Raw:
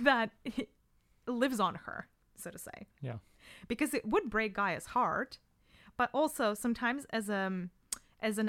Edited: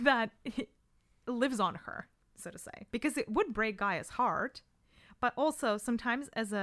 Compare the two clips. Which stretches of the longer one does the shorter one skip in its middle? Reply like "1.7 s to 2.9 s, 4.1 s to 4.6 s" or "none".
2.9 s to 3.7 s